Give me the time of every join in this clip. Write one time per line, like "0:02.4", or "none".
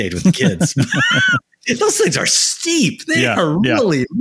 none